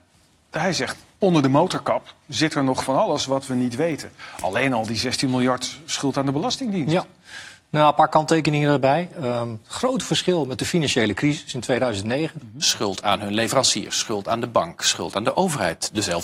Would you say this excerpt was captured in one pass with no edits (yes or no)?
no